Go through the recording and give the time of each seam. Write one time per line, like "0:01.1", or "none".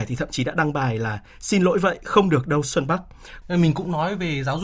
0:03.4